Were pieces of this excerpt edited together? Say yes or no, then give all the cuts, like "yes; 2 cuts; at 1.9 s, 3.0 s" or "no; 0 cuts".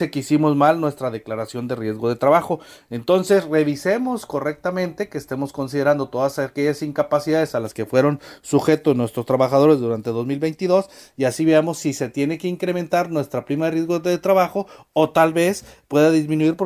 no; 0 cuts